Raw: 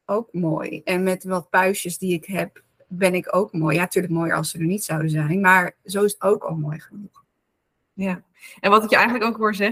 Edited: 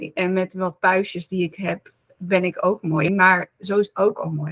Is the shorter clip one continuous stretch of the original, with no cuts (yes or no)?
no